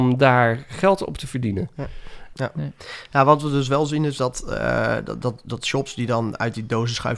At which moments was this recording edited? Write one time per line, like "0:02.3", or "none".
0:02.3